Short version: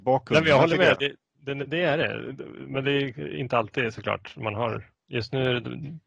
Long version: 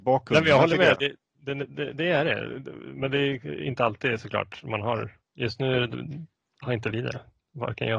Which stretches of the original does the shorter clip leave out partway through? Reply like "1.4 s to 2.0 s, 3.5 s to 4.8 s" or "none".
1.7 s to 1.9 s